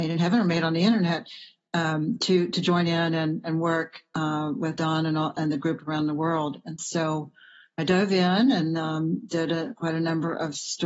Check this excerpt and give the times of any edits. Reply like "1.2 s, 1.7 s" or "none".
none